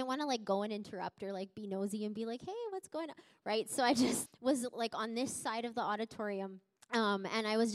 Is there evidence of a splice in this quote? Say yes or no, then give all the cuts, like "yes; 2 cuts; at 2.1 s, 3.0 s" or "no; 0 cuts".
yes; 1 cut; at 4.3 s